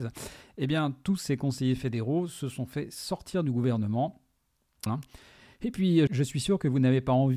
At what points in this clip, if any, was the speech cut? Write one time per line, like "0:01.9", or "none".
0:04.9
0:06.1